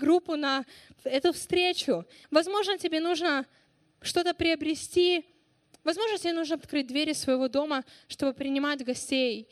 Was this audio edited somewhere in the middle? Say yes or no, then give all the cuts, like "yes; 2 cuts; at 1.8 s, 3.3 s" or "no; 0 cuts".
yes; 2 cuts; at 2.2 s, 6.6 s